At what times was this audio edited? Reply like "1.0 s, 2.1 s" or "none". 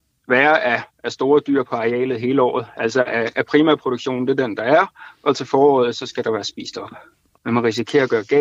7.4 s

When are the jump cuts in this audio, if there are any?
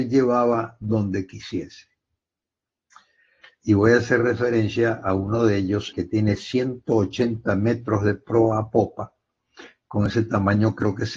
3.4 s, 5.9 s

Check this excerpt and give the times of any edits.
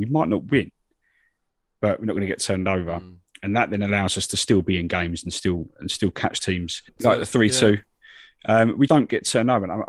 6.9 s, 8.9 s

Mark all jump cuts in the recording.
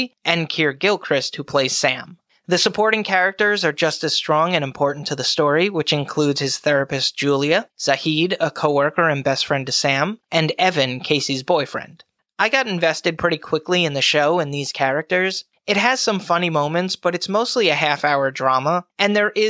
none

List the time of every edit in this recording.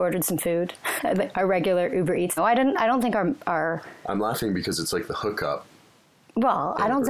1.0 s, 2.4 s

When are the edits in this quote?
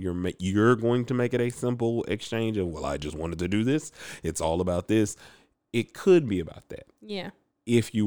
none

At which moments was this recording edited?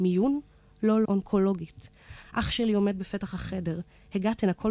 1.0 s, 2.2 s

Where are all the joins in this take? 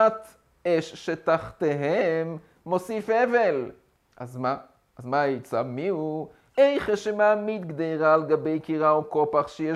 4.0 s, 6.5 s

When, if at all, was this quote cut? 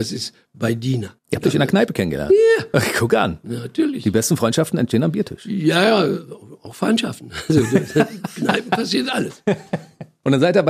none

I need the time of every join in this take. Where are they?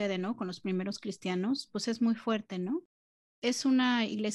3.3 s

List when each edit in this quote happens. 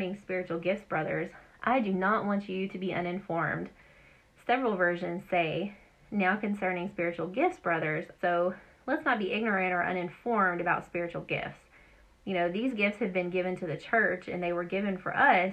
8.2 s

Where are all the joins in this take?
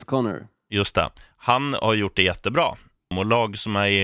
3.1 s

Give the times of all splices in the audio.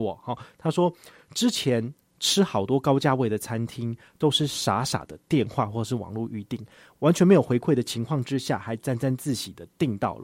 none

